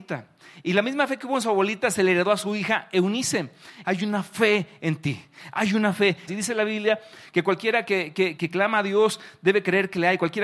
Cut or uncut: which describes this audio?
cut